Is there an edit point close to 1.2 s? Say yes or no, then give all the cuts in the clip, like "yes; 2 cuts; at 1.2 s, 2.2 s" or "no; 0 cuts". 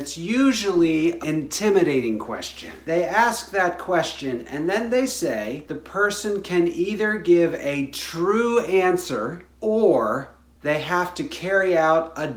yes; 1 cut; at 1.2 s